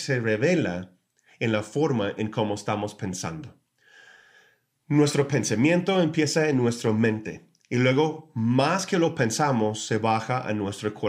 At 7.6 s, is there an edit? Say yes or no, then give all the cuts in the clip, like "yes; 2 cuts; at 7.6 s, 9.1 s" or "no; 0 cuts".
no; 0 cuts